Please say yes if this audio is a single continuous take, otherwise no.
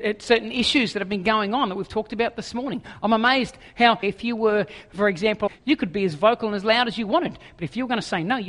no